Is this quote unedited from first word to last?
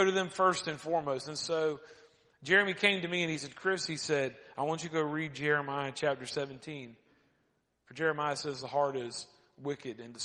yes; 0 cuts

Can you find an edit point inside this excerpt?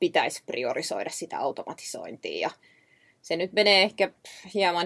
no; 0 cuts

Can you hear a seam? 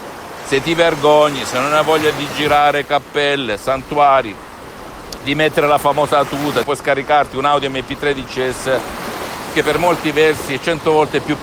yes; 1 cut; at 6.6 s

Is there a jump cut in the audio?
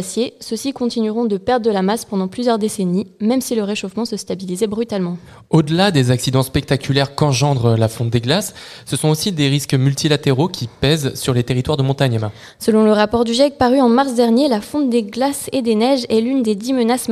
no; 0 cuts

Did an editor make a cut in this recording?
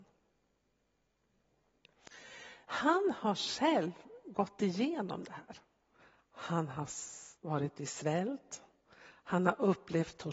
yes; 2 cuts; at 2.6 s, 7.4 s

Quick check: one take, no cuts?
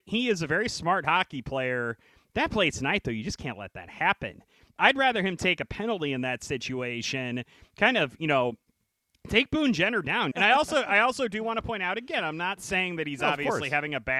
no; 1 cut; at 10.3 s

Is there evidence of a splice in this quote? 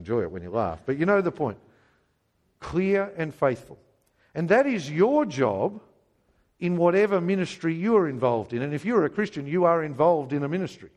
no; 0 cuts

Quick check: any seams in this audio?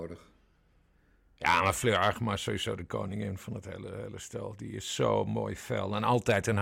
no; 0 cuts

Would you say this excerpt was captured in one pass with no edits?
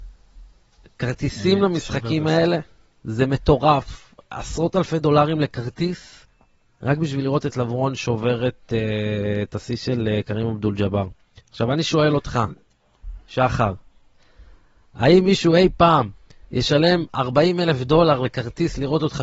yes; 0 cuts

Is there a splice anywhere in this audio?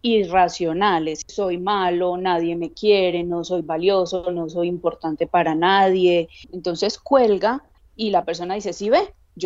yes; 1 cut; at 6.5 s

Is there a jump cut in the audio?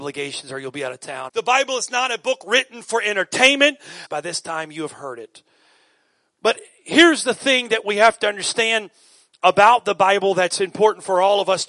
yes; 2 cuts; at 1.3 s, 4.1 s

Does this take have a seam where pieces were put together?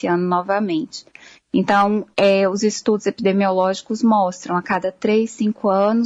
no; 0 cuts

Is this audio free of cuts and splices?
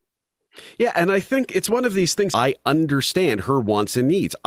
no; 1 cut; at 2.3 s

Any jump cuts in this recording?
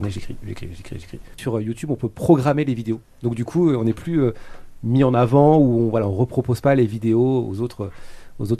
yes; 2 cuts; at 1.3 s, 3.0 s

